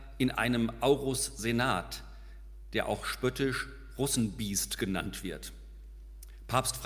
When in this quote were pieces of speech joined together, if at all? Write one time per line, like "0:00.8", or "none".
none